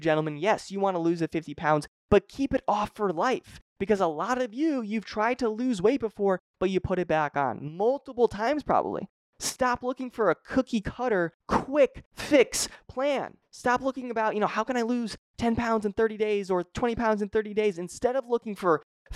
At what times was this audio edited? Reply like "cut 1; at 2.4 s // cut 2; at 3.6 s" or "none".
none

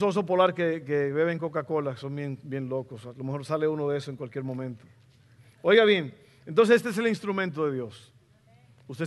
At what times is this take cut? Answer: none

